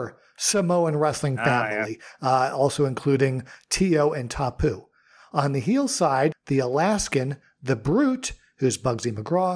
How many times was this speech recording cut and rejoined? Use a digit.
1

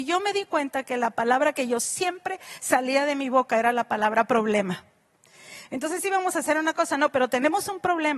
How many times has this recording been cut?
0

